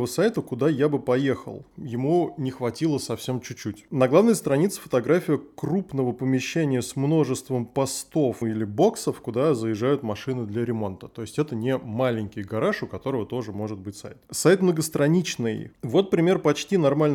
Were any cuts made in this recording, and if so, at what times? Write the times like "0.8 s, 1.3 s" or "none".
8.4 s, 15.7 s